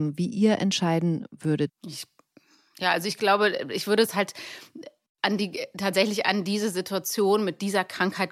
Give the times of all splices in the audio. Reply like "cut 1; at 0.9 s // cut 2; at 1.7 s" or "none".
cut 1; at 1.7 s

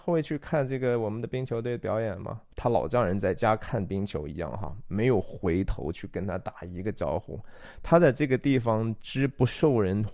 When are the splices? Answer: cut 1; at 2.5 s

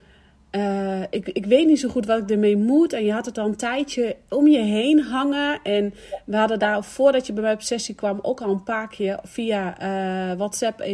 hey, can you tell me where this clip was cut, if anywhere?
none

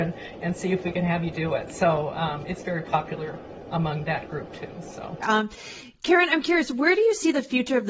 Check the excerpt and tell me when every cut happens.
cut 1; at 5.2 s

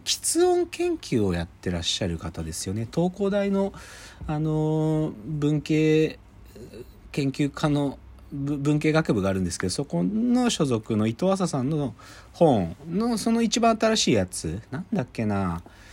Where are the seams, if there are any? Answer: none

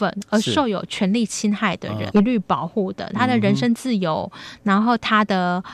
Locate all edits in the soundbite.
cut 1; at 2.1 s

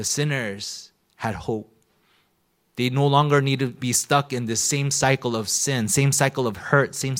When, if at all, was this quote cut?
none

